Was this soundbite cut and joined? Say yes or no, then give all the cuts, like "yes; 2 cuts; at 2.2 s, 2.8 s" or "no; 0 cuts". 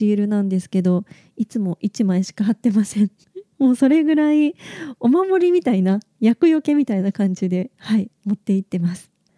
no; 0 cuts